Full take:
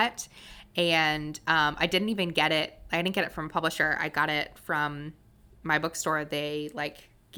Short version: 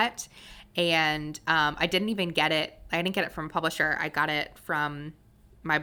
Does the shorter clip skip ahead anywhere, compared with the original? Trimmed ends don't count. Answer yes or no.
no